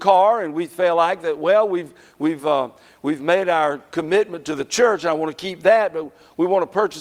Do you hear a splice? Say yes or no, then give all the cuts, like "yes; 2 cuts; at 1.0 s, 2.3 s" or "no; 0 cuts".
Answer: no; 0 cuts